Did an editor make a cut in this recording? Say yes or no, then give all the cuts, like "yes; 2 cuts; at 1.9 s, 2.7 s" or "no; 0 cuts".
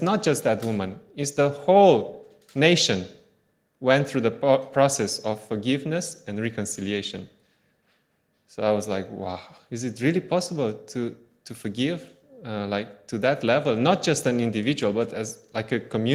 no; 0 cuts